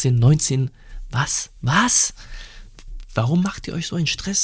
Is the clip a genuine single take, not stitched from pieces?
yes; 0 cuts

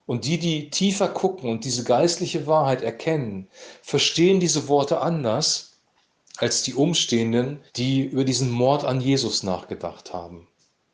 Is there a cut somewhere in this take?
yes; 1 cut; at 7.7 s

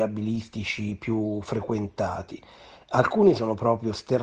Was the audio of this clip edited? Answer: no; 0 cuts

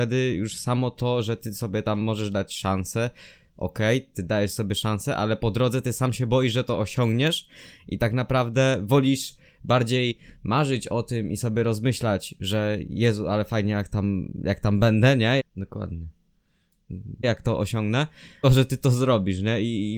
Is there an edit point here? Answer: yes; 3 cuts; at 15.4 s, 17.2 s, 18.4 s

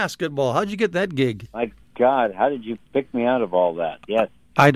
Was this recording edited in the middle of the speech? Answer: no; 0 cuts

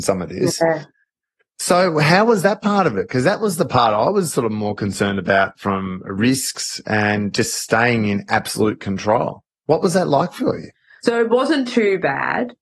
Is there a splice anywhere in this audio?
no; 0 cuts

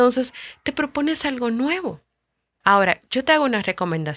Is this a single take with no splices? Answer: no; 1 cut; at 2.6 s

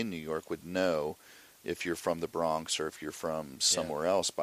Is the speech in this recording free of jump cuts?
yes; 0 cuts

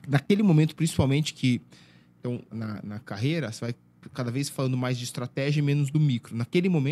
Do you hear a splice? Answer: yes; 1 cut; at 2.5 s

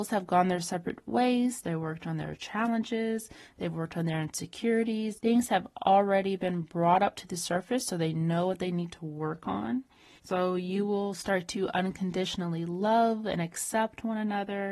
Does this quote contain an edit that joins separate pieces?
yes; 3 cuts; at 1.6 s, 5.1 s, 10.2 s

